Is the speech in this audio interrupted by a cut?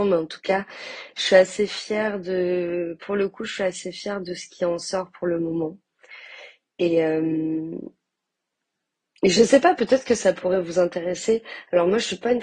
no; 0 cuts

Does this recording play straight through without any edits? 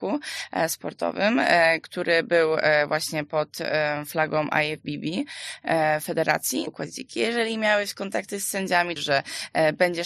no; 2 cuts; at 6.7 s, 9.0 s

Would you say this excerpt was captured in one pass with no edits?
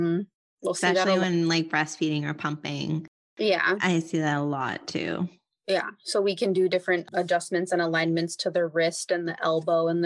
yes; 0 cuts

